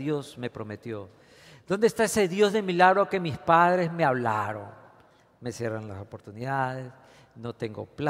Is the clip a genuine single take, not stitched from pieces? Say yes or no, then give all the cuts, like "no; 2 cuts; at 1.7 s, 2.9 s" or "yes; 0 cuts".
yes; 0 cuts